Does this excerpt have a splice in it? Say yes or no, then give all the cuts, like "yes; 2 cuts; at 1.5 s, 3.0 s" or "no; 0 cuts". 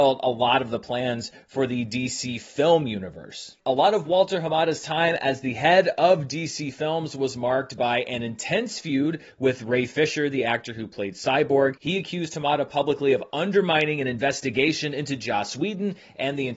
no; 0 cuts